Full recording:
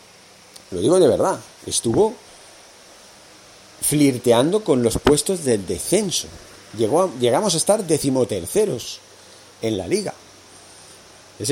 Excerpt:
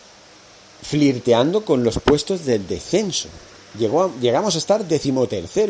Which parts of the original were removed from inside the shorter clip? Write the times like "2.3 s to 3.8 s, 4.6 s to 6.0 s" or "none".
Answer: none